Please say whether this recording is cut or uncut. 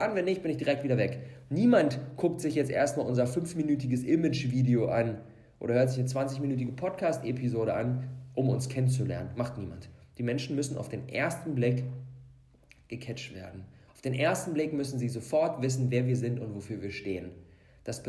uncut